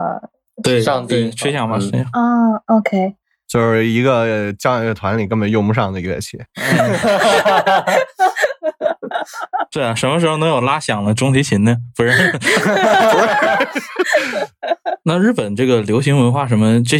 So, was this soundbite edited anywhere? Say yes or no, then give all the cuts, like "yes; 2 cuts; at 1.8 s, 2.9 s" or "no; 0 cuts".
no; 0 cuts